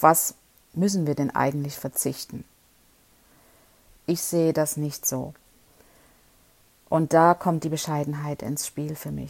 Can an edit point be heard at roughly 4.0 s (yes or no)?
yes